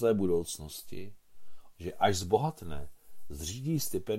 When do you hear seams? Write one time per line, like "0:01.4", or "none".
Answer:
0:01.7

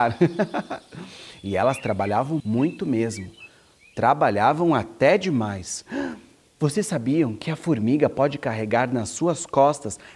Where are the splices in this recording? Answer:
0:02.4

